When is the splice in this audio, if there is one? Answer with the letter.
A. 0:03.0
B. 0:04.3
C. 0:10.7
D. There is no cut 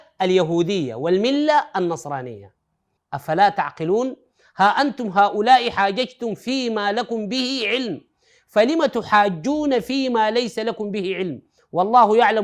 A